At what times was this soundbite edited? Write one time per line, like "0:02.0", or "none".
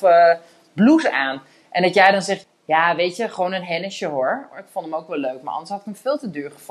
0:02.4
0:04.5